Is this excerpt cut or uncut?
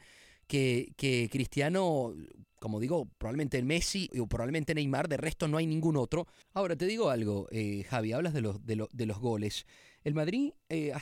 cut